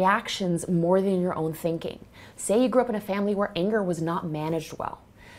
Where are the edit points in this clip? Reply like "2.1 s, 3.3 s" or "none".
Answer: 2.3 s